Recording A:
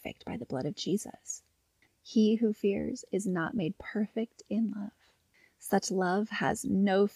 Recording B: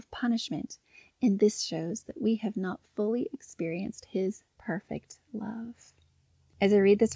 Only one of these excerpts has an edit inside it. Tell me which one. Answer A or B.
A